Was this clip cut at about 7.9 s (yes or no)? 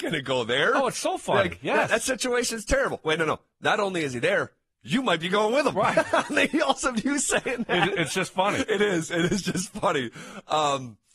no